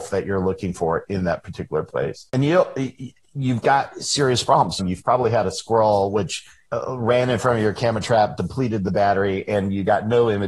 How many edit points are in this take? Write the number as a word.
two